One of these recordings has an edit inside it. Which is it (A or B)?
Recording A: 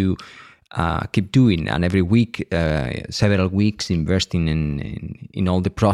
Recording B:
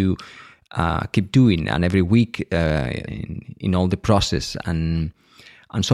B